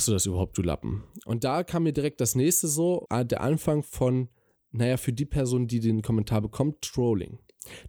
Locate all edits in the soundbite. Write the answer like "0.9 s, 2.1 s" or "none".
3.1 s